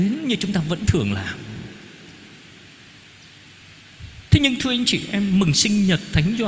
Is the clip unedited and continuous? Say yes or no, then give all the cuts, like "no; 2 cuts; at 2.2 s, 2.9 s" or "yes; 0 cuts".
no; 1 cut; at 4.3 s